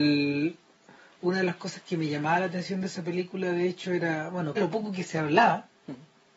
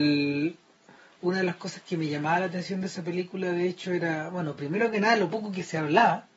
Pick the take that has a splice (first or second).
first